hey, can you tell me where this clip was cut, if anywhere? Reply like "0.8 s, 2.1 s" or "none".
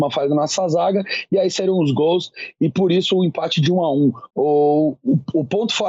4.3 s